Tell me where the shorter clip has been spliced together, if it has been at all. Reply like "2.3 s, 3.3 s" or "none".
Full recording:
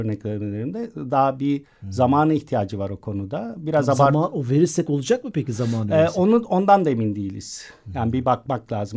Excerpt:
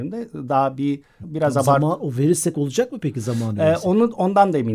1.2 s